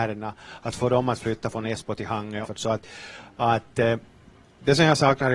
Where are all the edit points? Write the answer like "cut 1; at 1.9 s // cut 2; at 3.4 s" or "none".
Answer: cut 1; at 2.5 s